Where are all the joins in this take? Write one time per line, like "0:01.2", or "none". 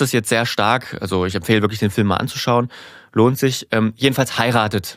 none